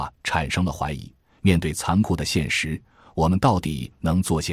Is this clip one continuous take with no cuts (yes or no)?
yes